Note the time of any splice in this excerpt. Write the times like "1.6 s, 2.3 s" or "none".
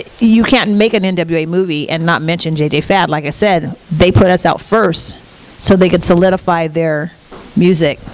none